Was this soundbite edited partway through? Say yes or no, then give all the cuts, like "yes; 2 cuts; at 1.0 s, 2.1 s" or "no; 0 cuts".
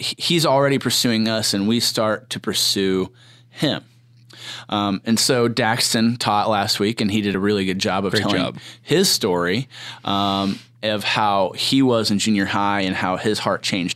no; 0 cuts